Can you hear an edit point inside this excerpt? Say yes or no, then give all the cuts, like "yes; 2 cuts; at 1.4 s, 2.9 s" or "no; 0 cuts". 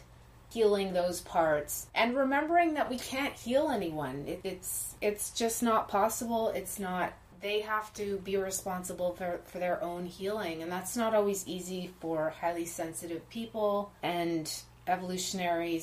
no; 0 cuts